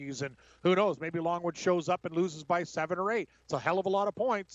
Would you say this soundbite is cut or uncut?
uncut